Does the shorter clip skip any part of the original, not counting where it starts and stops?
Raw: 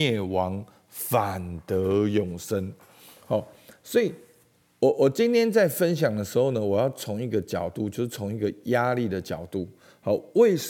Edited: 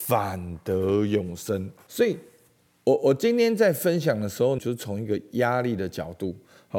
yes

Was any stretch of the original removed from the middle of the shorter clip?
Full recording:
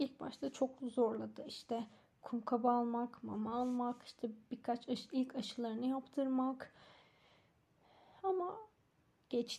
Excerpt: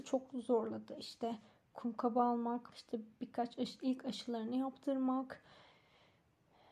yes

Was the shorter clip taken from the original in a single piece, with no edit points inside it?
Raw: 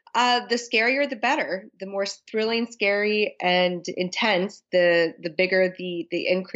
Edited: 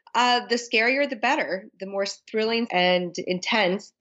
no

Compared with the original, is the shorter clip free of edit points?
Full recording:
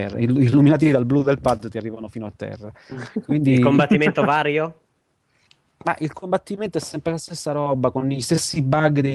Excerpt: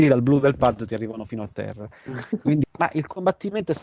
no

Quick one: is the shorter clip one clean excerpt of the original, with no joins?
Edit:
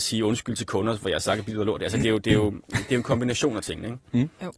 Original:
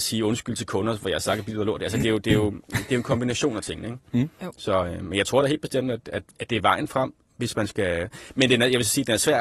yes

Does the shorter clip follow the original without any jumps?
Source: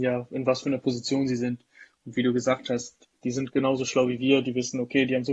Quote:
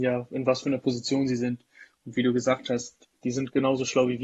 yes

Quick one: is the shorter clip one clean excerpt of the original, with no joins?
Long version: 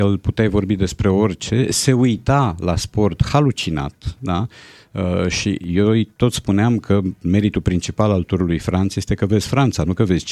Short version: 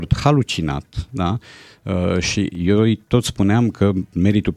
yes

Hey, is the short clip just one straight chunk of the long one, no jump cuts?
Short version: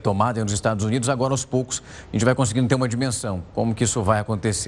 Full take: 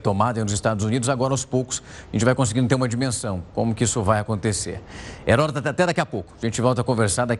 yes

